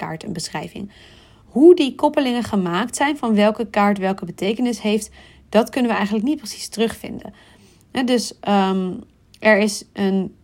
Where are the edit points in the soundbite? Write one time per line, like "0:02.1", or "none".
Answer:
none

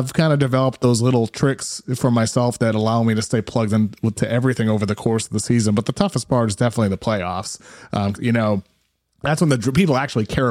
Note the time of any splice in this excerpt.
0:08.1

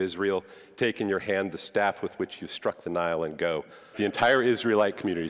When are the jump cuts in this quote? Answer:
0:03.9

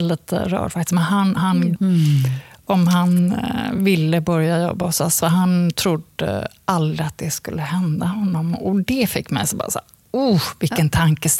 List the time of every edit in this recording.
0:01.8

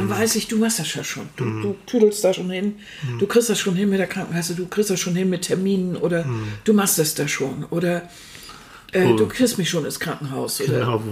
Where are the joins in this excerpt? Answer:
none

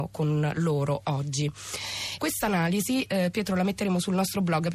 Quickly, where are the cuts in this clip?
0:02.2

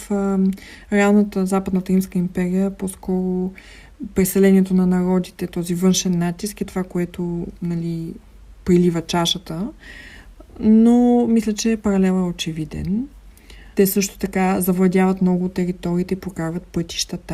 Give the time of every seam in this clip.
0:13.7

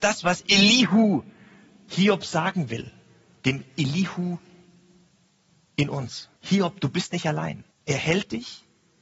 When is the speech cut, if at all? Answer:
0:06.4
0:07.7

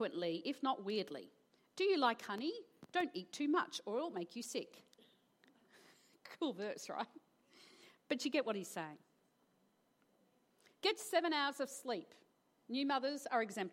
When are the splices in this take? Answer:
none

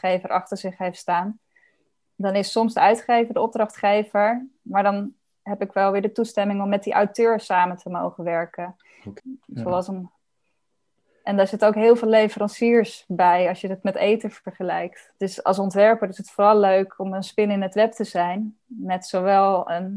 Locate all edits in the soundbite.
0:09.2
0:15.2

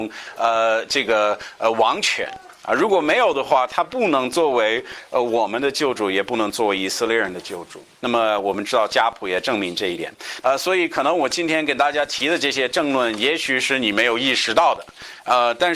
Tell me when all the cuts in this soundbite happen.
0:08.0
0:10.4

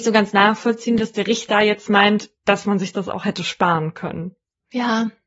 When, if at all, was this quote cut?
none

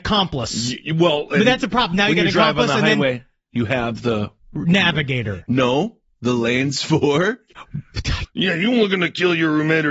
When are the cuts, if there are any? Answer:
0:08.2

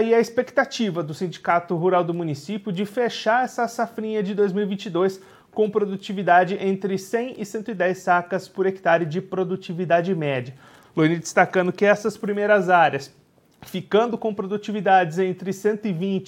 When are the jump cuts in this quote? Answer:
0:10.8

